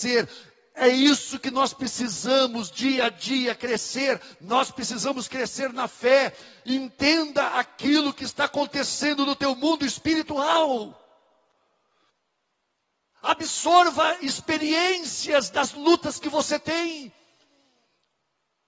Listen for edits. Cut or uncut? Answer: uncut